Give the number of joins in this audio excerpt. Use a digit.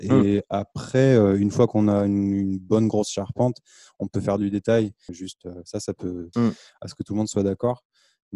2